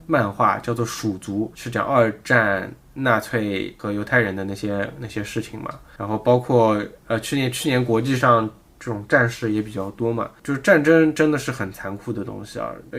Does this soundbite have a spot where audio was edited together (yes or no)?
no